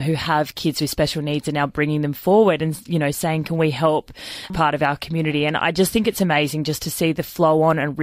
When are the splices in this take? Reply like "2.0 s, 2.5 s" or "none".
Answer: 4.5 s